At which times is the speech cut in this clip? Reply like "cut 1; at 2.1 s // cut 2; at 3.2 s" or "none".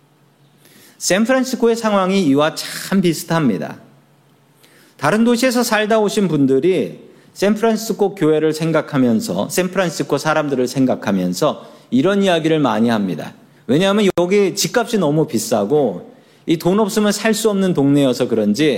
cut 1; at 13.6 s